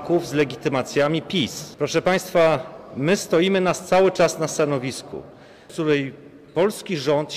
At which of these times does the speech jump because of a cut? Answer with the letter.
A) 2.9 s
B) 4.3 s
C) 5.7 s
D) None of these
C